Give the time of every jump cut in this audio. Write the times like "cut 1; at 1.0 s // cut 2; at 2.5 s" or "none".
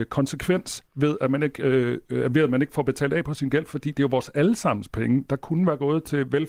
none